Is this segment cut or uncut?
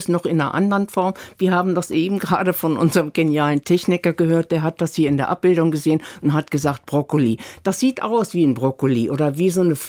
uncut